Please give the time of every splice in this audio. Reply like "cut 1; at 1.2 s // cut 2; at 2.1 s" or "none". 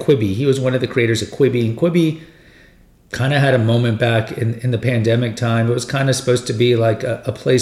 none